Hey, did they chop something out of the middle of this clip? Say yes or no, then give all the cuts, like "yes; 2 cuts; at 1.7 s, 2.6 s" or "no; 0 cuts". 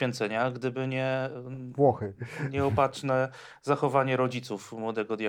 no; 0 cuts